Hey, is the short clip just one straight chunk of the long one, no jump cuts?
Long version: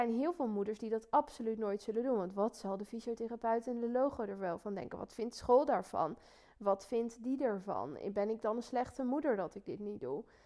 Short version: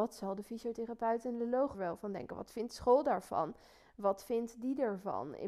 no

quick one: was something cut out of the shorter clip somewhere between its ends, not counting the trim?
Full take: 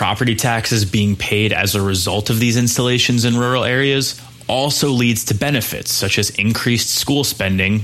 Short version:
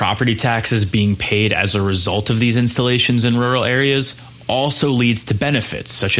no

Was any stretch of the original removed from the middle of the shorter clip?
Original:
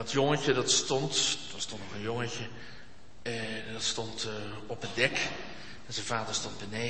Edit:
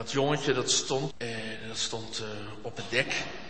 yes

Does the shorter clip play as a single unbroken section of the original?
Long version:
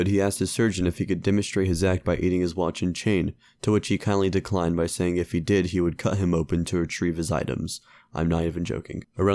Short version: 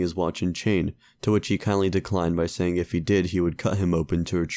yes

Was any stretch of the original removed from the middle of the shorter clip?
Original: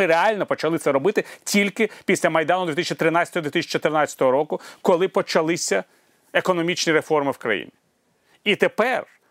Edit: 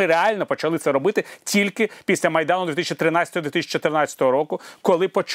no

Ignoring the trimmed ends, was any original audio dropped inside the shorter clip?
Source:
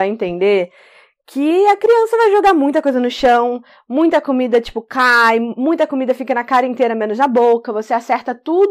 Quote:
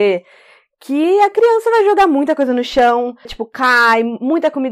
yes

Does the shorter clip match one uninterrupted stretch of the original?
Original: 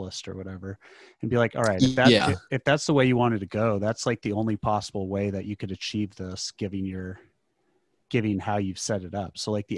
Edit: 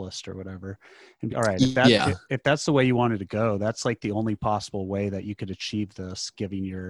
no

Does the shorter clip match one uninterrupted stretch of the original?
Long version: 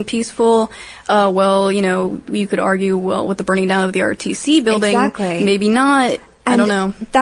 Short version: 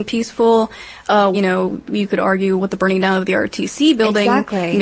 no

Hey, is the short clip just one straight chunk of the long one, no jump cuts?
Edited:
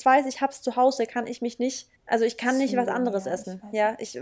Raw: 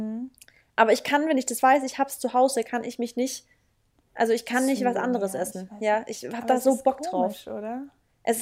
no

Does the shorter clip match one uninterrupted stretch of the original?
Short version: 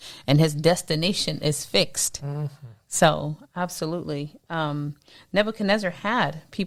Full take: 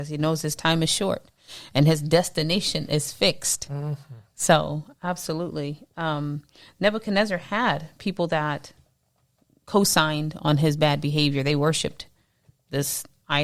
yes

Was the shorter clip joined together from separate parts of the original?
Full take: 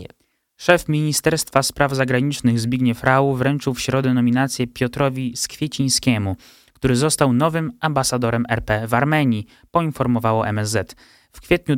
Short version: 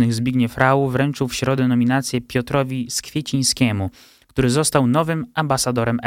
no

